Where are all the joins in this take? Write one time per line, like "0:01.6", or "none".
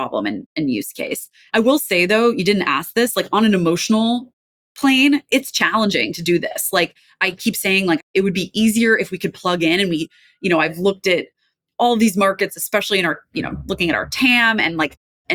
0:01.5